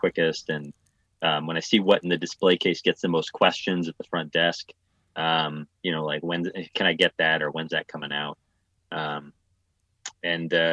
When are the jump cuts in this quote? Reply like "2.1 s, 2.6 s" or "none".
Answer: none